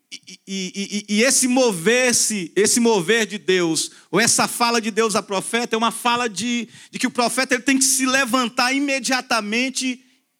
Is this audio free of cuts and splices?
yes; 0 cuts

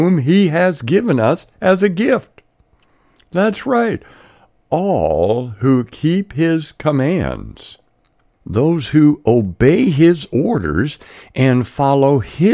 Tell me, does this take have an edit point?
no; 0 cuts

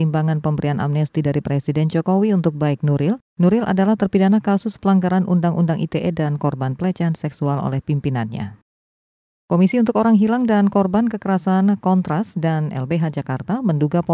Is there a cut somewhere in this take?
no; 0 cuts

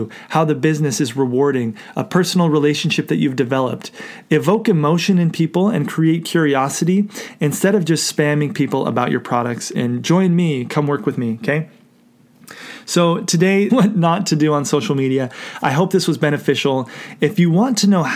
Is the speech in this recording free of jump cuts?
no; 2 cuts; at 9.7 s, 13.7 s

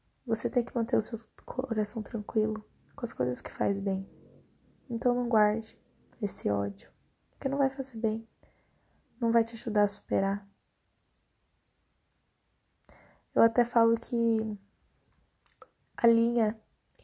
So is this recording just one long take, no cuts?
yes; 0 cuts

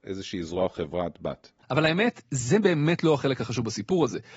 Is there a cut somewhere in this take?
no; 0 cuts

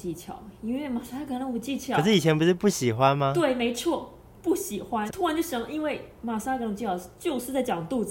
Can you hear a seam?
yes; 1 cut; at 5.1 s

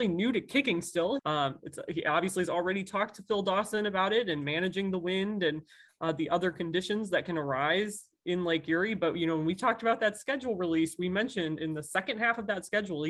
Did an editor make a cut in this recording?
yes; 1 cut; at 1.2 s

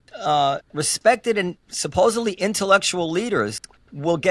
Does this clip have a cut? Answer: no; 0 cuts

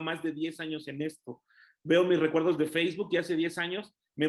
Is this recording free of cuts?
yes; 0 cuts

